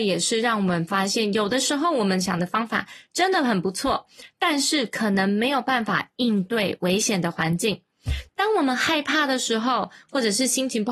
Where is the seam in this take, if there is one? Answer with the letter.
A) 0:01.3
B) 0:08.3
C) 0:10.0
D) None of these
B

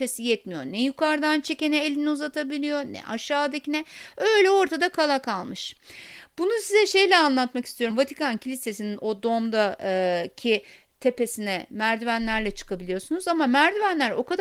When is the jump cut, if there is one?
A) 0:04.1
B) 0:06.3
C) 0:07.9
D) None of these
C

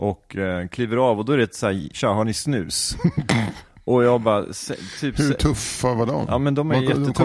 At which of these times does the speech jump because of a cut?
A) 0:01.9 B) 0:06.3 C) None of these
A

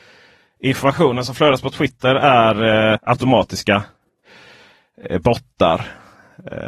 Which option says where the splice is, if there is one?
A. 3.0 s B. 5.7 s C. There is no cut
A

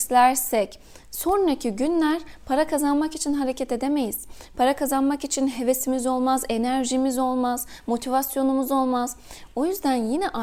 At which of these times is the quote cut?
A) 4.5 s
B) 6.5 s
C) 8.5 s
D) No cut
D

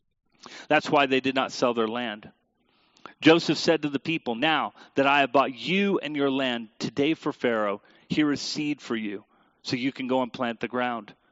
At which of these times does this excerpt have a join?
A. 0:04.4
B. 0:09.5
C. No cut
C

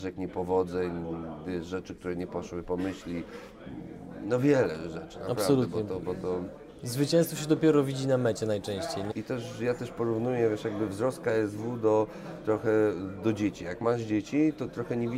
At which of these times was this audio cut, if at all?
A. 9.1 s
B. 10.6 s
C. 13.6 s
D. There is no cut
A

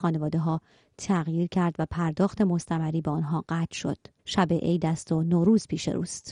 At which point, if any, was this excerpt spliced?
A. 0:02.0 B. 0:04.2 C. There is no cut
B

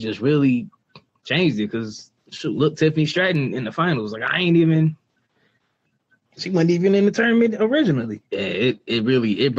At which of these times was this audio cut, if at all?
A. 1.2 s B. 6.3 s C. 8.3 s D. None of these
C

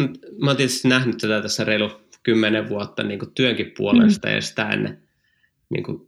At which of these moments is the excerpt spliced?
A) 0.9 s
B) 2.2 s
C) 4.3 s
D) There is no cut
D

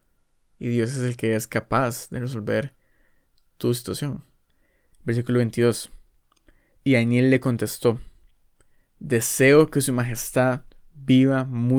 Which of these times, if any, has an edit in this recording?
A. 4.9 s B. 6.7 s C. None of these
A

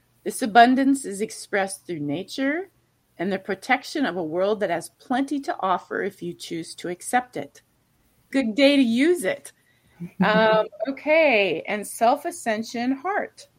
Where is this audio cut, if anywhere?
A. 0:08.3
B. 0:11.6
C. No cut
A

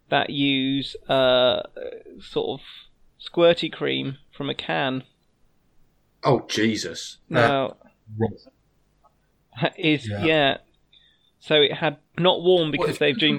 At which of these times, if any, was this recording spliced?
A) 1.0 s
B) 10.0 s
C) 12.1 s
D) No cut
C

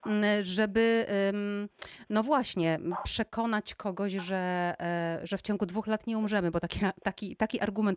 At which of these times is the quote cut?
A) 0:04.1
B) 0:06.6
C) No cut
C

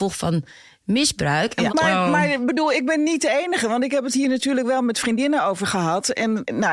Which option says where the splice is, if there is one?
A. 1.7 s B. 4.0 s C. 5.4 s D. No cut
A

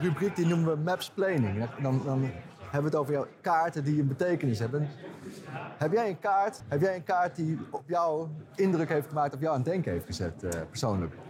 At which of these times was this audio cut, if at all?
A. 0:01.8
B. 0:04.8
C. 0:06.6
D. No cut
C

